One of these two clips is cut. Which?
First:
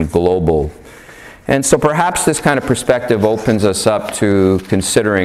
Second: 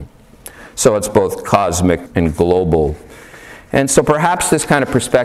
second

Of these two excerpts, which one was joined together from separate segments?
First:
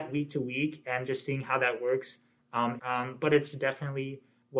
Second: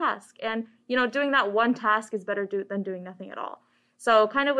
first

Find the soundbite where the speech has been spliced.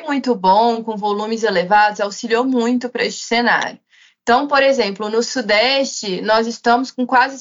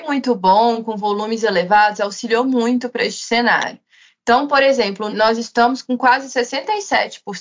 second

